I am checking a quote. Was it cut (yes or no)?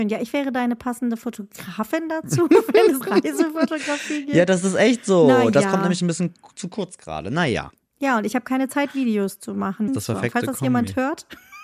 yes